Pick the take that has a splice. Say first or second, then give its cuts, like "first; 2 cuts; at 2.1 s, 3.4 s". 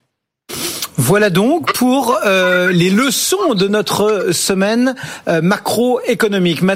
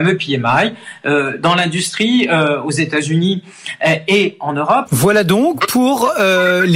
second; 1 cut; at 4.9 s